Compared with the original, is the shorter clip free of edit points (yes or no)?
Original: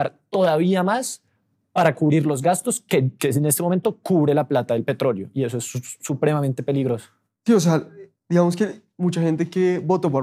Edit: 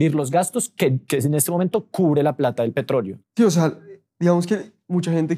no